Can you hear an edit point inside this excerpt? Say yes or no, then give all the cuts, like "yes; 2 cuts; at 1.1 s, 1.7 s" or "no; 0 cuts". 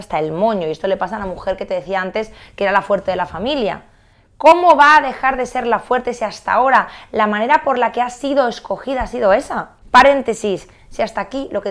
no; 0 cuts